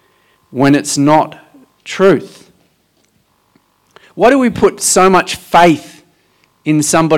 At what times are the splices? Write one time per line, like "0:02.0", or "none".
none